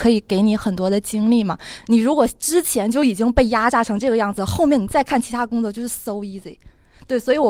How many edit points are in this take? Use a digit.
1